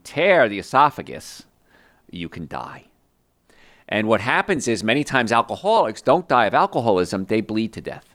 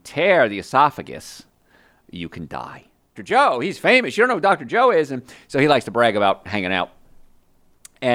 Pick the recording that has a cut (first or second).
second